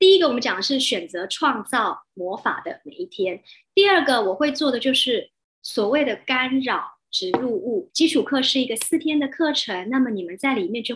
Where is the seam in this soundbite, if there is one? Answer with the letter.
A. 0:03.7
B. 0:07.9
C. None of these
B